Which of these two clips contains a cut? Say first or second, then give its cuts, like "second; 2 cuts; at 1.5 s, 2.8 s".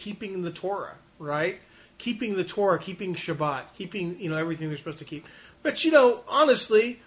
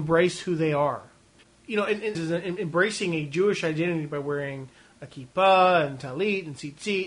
second; 1 cut; at 2.1 s